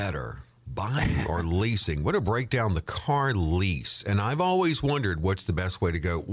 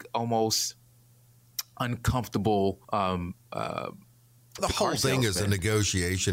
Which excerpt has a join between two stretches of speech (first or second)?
second